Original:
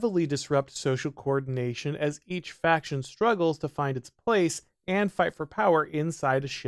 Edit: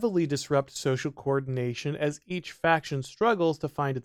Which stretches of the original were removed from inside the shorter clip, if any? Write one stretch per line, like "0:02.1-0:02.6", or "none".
none